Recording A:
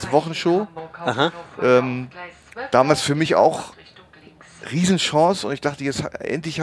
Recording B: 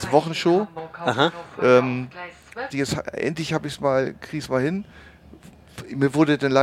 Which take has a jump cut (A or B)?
B